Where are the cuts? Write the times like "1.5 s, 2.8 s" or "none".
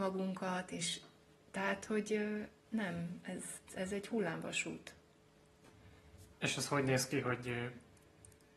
3.7 s, 6.3 s